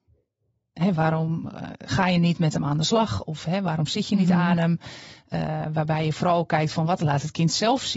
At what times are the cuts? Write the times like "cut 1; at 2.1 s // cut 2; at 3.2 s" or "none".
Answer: cut 1; at 0.9 s // cut 2; at 5.3 s